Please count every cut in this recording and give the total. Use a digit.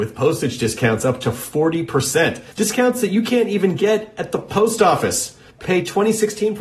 2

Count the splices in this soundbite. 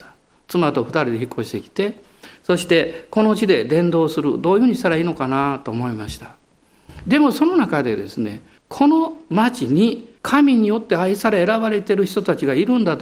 2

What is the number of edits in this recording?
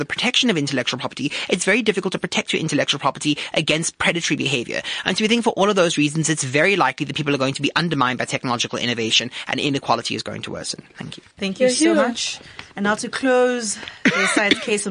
2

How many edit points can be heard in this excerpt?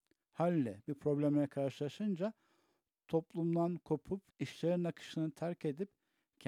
1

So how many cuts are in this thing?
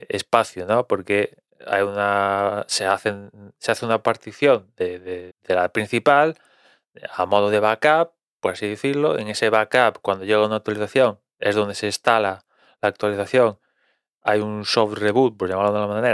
1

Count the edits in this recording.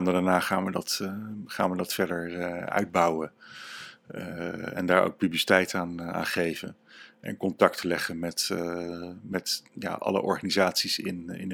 0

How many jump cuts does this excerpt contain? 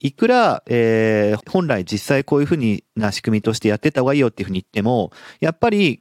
1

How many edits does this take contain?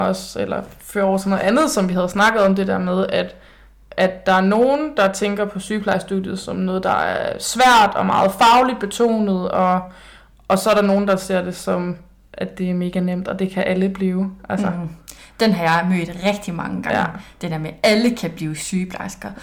0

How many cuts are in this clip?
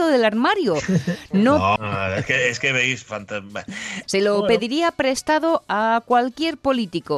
2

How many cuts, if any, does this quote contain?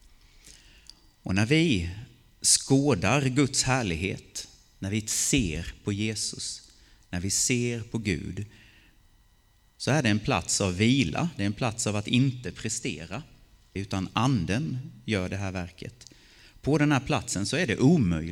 1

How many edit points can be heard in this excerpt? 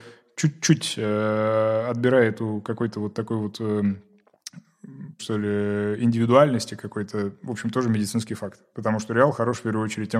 1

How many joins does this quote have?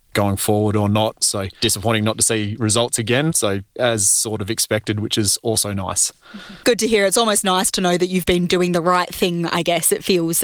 1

